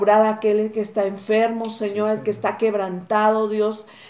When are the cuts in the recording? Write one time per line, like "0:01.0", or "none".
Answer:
none